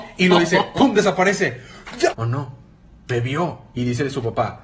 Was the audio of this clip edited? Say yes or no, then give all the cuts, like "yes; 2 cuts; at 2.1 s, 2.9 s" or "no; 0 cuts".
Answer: yes; 1 cut; at 2.1 s